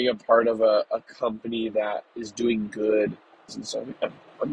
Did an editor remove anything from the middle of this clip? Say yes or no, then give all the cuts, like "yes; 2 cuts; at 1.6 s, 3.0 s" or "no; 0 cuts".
yes; 1 cut; at 3.5 s